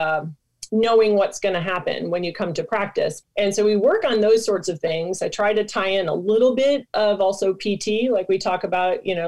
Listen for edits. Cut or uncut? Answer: cut